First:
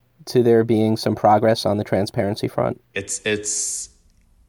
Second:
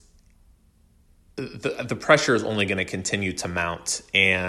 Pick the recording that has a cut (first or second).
first